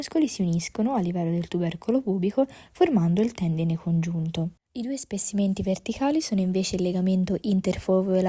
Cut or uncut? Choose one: cut